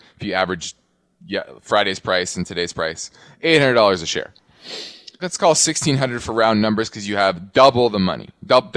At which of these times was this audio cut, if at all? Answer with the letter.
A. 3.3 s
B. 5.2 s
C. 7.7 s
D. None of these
B